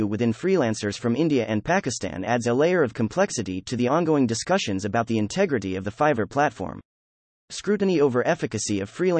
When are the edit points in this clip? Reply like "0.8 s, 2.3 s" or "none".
none